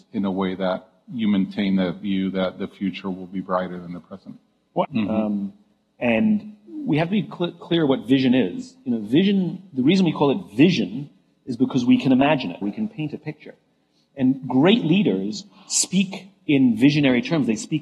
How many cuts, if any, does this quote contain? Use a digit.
2